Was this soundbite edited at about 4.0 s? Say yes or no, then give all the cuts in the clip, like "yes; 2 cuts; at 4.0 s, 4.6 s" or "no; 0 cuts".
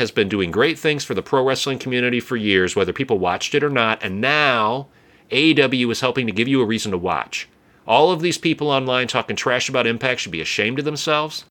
no; 0 cuts